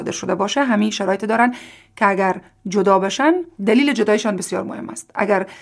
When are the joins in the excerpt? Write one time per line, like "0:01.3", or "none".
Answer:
0:03.5